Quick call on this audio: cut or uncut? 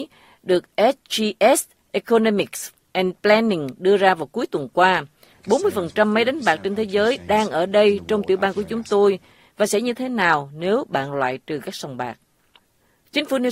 cut